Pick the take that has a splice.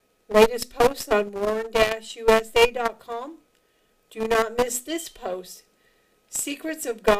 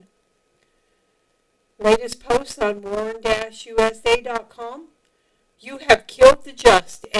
second; 1 cut; at 5.5 s

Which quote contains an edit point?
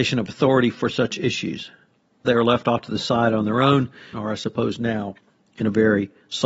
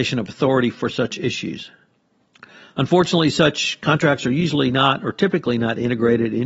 first; 2 cuts; at 2.2 s, 4.1 s

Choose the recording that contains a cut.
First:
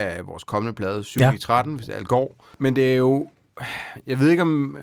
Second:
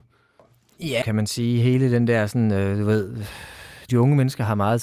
second; 2 cuts; at 1.0 s, 3.9 s

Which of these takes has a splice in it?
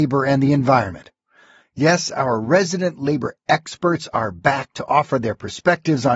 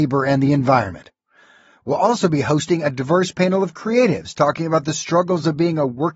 first; 1 cut; at 1.6 s

